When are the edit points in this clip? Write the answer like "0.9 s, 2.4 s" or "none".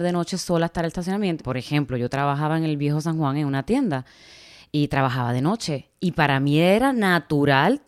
1.4 s